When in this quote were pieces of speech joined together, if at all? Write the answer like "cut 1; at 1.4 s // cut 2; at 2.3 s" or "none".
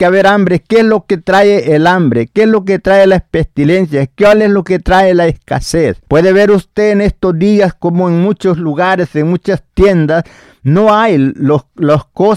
cut 1; at 6.0 s